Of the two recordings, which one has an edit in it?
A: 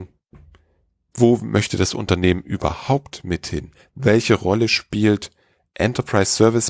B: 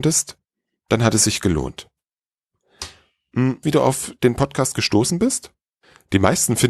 B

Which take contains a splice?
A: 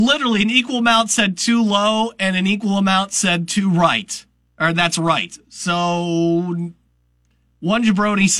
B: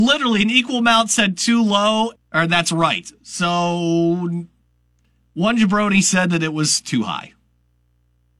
B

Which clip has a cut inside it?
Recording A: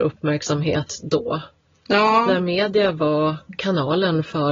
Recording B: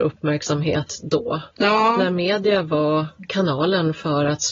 B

